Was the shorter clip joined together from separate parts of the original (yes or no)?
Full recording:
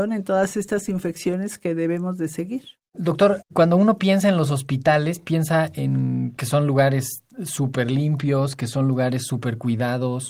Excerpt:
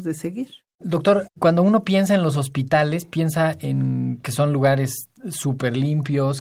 no